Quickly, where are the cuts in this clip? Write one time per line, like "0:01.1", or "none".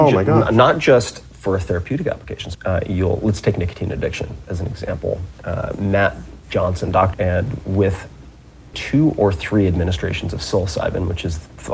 0:02.5
0:07.1
0:08.7